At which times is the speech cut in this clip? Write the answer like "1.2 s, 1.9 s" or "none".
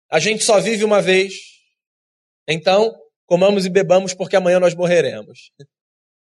3.2 s